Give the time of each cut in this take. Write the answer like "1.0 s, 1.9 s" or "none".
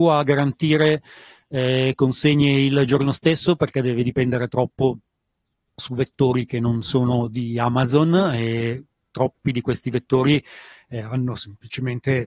none